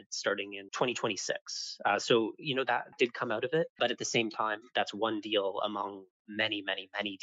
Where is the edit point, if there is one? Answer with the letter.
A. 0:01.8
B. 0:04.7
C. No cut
B